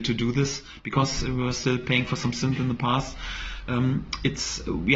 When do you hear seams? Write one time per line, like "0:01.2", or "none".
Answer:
none